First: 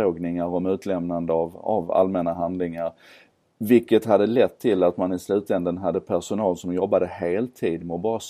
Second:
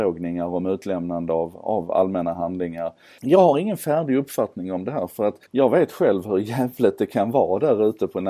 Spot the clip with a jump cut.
second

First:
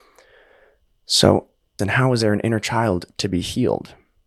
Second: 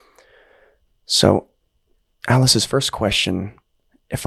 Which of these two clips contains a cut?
first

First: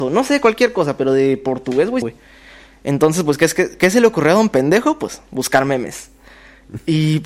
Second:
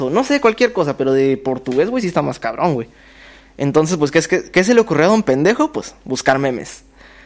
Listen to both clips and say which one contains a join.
first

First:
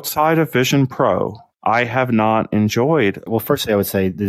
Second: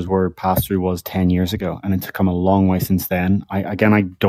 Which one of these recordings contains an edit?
first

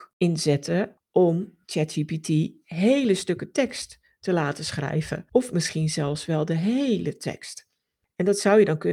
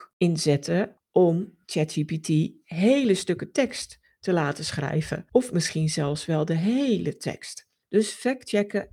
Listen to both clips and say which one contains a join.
second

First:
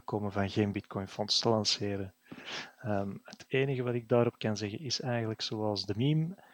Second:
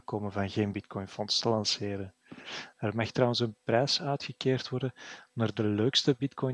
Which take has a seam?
second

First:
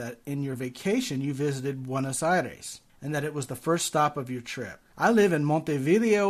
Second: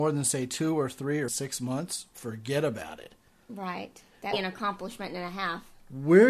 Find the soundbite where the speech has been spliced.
second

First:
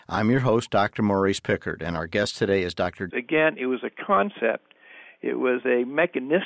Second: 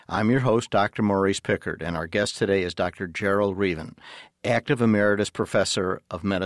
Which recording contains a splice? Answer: first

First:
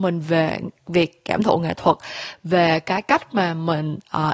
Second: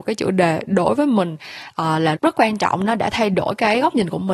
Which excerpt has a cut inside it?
second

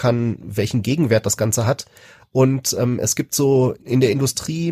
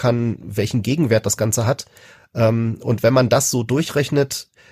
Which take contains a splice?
first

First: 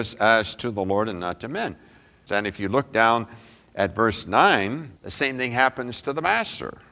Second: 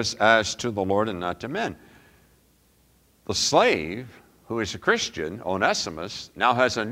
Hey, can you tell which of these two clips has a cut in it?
first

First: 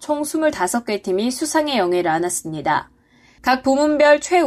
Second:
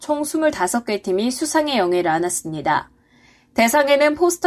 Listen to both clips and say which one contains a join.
first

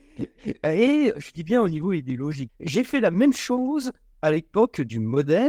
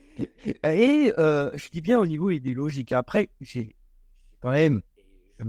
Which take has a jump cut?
first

